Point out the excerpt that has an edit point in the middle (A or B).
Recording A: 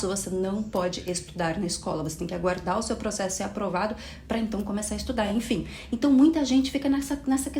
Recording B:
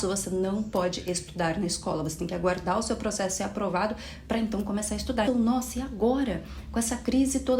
B